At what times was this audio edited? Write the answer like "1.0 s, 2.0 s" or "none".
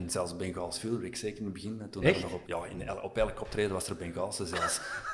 2.4 s